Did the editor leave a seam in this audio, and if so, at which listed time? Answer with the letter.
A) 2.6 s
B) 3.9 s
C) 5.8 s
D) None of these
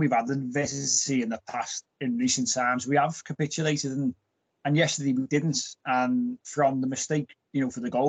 D